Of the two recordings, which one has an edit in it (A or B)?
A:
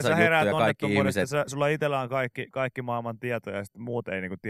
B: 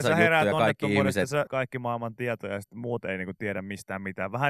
B